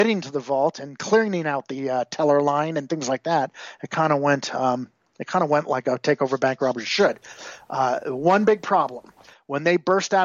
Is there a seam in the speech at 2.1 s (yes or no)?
no